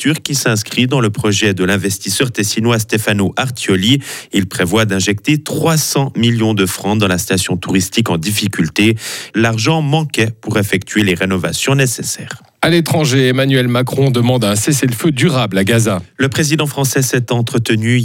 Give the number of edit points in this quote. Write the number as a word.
one